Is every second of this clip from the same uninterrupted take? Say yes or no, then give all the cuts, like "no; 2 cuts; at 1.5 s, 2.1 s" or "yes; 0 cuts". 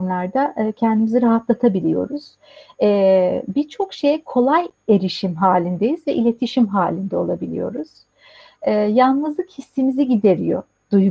yes; 0 cuts